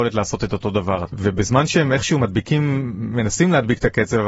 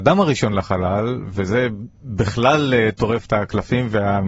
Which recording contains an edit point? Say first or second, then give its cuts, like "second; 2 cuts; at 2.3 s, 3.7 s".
first; 1 cut; at 1.0 s